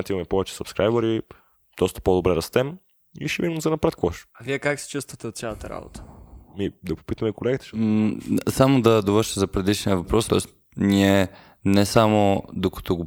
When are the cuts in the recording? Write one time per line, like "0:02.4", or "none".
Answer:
0:10.3